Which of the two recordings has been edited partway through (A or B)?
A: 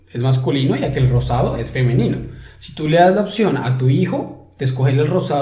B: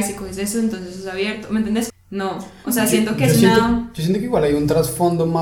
B